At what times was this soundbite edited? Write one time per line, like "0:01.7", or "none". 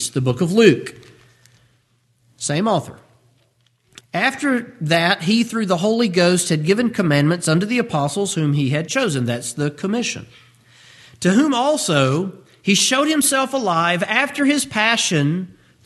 0:04.0